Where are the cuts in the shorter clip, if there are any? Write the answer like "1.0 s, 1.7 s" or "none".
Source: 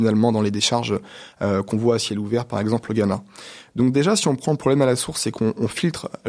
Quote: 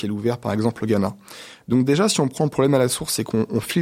none